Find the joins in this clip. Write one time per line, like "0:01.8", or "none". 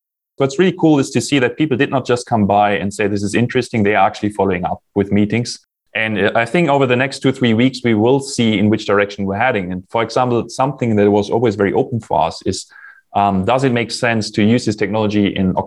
none